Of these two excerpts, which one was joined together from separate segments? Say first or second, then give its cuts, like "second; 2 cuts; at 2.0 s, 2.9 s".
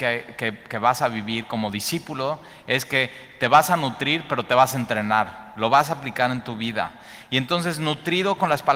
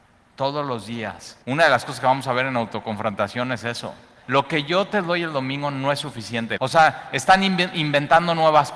second; 3 cuts; at 1.4 s, 4.2 s, 6.6 s